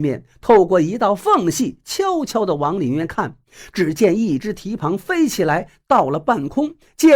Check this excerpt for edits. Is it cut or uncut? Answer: cut